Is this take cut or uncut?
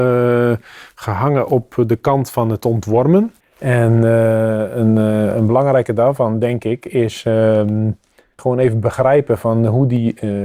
cut